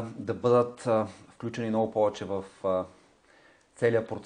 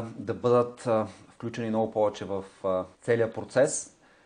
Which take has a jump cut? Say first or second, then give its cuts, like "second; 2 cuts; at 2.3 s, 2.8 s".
second; 1 cut; at 2.9 s